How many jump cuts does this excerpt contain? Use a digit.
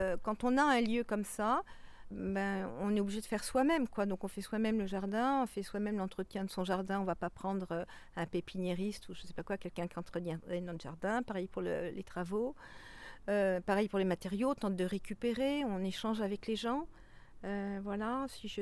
1